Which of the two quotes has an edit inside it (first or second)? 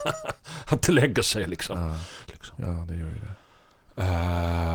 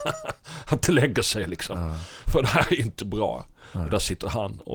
first